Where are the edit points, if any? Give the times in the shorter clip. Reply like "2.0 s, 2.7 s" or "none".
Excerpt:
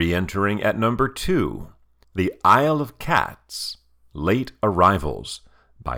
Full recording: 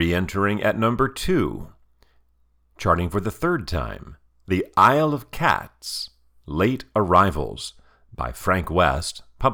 2.0 s